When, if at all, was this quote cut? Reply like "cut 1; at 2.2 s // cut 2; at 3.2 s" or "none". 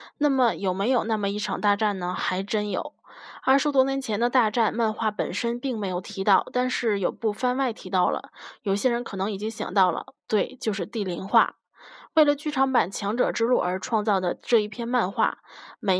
none